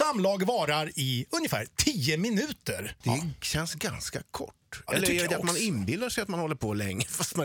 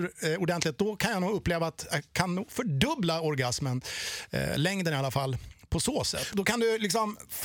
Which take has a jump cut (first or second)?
second